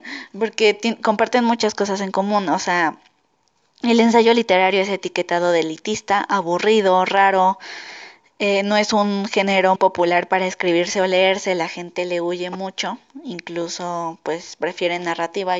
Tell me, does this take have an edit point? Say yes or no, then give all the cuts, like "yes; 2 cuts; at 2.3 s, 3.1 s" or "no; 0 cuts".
yes; 1 cut; at 9.8 s